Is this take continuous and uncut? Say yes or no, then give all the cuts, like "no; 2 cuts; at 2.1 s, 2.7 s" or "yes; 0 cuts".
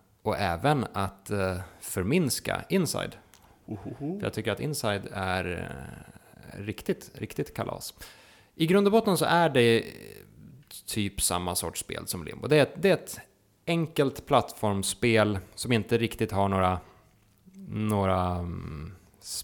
yes; 0 cuts